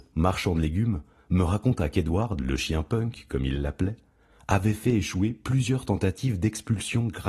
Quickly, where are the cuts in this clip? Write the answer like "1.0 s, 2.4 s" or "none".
none